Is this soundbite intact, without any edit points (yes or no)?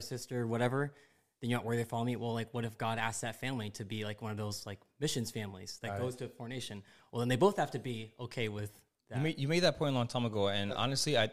yes